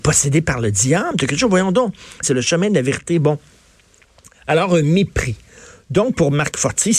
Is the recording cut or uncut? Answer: cut